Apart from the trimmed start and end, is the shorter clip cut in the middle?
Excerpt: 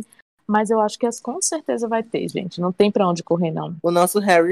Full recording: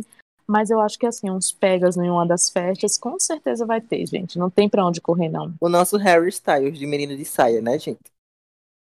yes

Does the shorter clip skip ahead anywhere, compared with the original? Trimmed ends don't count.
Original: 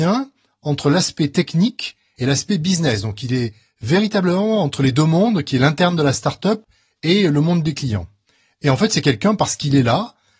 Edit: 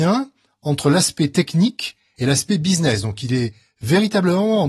no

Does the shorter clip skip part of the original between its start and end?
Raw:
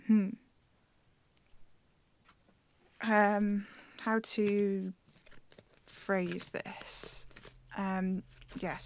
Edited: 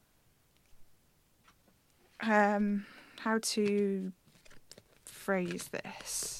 no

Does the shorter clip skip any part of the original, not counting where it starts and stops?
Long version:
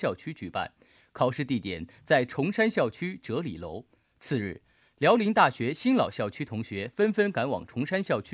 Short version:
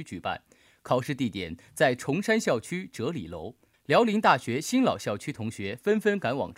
yes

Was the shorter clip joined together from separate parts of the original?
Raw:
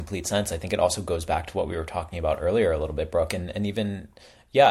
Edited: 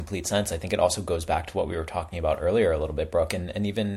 no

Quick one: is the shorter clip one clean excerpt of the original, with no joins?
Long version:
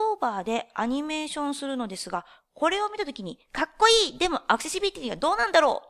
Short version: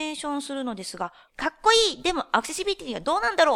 no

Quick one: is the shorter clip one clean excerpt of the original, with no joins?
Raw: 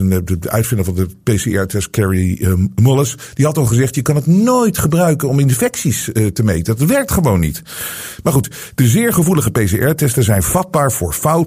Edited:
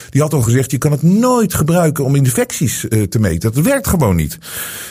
yes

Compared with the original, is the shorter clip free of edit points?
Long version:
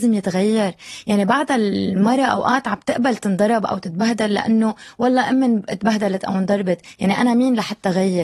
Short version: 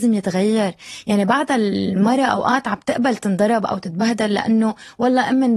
yes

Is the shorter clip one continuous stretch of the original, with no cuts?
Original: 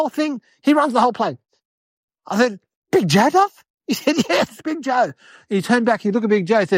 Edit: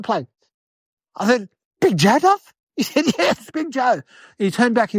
yes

